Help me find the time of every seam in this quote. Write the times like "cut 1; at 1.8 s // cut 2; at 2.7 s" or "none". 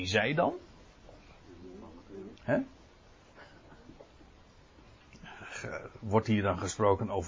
cut 1; at 2.4 s